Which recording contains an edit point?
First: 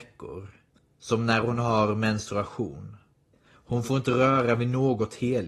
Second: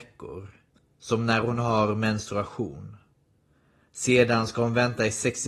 first; 1 cut; at 3.3 s

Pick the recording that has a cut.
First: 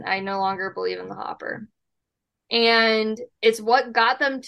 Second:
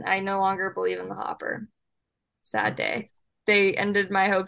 first; 1 cut; at 2.4 s

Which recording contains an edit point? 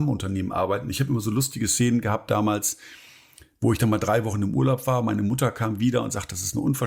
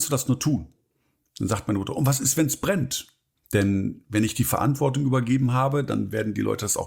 second; 1 cut; at 3.4 s

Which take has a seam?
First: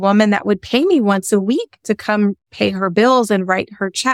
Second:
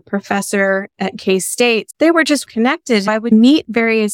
second; 1 cut; at 2.5 s

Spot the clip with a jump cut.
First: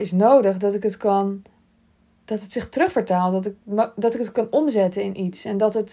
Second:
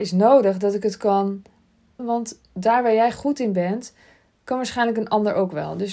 second; 1 cut; at 2.0 s

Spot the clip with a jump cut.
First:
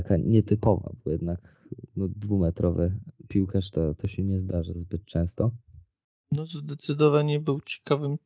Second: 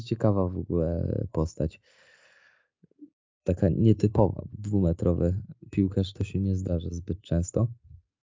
second; 2 cuts; at 4.5 s, 6.1 s

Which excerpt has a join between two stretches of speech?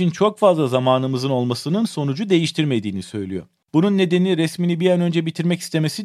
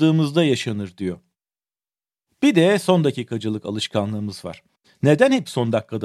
first; 1 cut; at 3.6 s

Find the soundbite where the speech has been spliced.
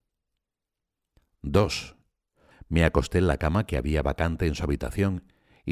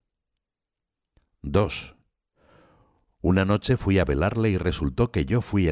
first; 1 cut; at 2.5 s

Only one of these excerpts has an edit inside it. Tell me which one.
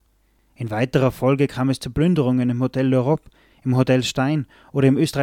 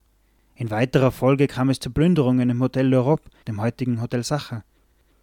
second; 1 cut; at 3.4 s

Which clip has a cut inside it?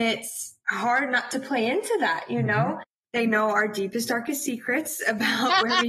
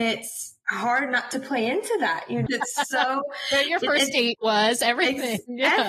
second; 1 cut; at 2.5 s

